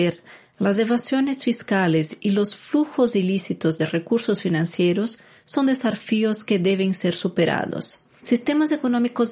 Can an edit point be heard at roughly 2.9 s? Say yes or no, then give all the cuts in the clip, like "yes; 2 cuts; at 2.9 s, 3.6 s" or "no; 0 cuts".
no; 1 cut; at 8.2 s